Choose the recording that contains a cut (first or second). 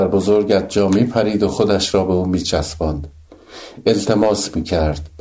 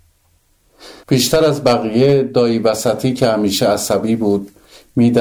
second